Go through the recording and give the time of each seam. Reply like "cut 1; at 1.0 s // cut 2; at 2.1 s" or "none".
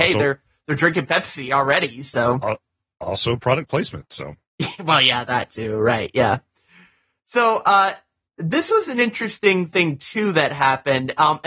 none